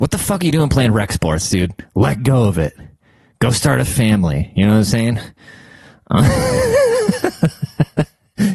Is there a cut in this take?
no; 0 cuts

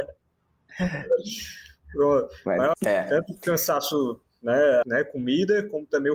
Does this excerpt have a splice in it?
yes; 2 cuts; at 2.7 s, 4.8 s

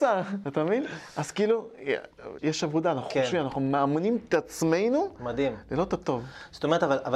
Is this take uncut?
no; 1 cut; at 2.4 s

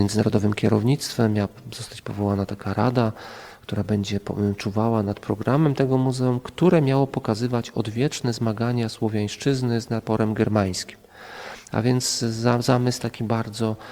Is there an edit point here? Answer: no; 0 cuts

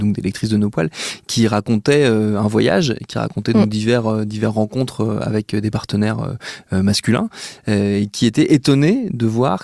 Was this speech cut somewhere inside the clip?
no; 0 cuts

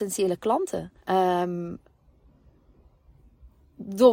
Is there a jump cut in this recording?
yes; 1 cut; at 1.0 s

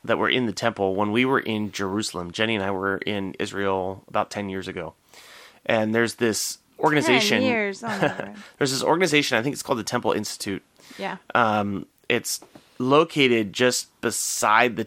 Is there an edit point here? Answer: no; 0 cuts

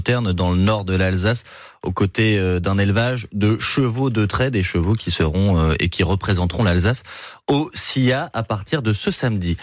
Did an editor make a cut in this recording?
no; 0 cuts

